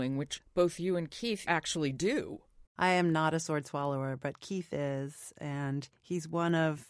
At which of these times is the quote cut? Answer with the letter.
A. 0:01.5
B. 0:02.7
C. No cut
B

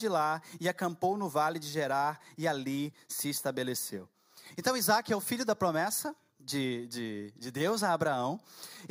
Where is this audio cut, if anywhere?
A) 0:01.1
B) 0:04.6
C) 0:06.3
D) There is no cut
D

